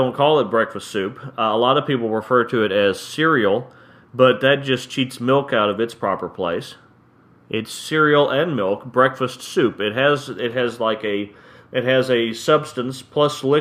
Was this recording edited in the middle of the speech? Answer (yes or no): no